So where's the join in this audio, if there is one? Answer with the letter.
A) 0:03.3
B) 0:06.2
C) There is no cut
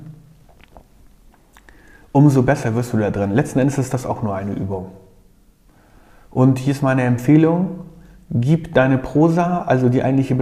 C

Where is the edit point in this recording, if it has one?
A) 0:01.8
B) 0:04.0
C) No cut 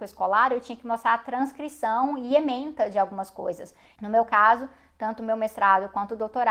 B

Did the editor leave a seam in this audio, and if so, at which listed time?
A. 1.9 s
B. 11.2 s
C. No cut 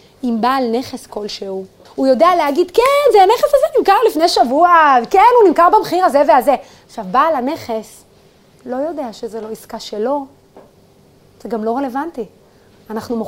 A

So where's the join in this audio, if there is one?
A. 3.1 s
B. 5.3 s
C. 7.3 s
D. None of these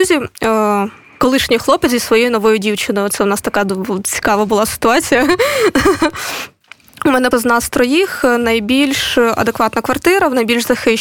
C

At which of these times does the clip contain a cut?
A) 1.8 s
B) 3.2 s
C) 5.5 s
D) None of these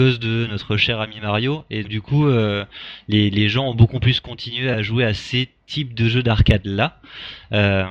A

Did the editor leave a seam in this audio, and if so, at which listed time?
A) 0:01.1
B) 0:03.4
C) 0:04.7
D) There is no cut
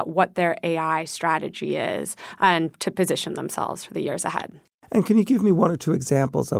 D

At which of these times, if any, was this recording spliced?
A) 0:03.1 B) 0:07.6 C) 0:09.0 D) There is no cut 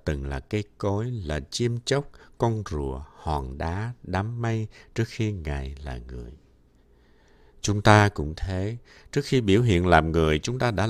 D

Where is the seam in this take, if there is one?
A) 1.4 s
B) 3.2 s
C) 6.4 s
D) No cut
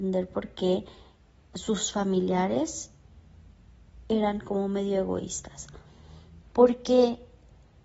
C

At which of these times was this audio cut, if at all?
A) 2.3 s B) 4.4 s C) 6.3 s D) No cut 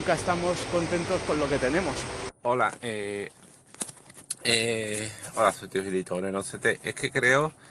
A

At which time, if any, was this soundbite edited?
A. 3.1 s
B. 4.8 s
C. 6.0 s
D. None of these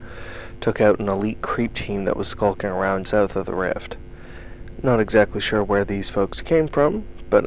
A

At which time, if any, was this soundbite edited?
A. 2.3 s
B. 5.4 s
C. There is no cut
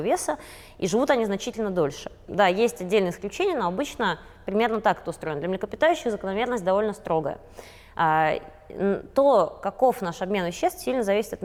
A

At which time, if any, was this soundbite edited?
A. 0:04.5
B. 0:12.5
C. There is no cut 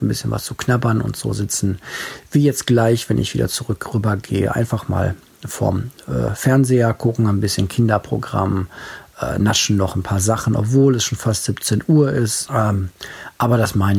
B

